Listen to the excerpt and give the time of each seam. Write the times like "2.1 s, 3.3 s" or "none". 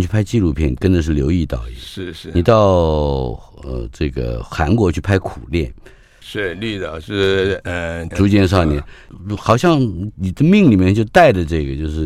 6.2 s, 8.1 s